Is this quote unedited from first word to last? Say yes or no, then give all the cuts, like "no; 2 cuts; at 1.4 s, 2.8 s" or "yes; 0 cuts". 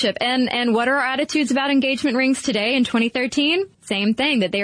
no; 1 cut; at 3.7 s